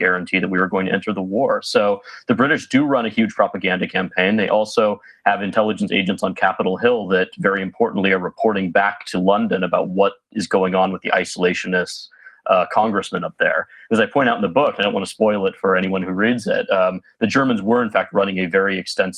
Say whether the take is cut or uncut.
uncut